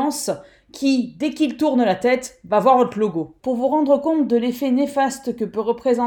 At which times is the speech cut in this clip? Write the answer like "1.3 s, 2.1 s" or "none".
3.4 s